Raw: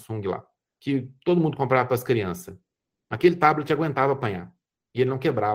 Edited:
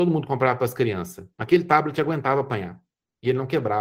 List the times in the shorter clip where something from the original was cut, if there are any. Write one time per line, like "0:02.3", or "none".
0:01.3